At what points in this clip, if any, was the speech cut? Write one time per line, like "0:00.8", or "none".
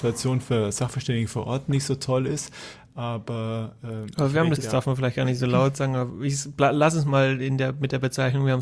0:04.6